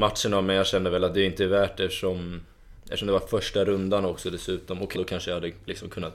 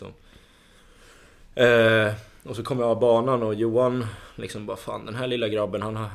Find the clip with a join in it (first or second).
first